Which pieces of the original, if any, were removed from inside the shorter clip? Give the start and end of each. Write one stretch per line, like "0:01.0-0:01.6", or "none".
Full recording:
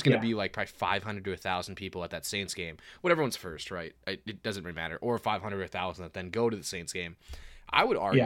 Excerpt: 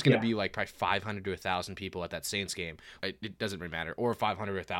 0:03.0-0:04.0